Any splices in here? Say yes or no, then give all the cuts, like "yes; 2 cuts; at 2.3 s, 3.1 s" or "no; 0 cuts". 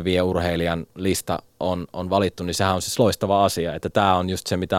no; 0 cuts